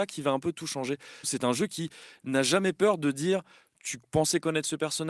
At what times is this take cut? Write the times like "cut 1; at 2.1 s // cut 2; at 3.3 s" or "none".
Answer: cut 1; at 1.2 s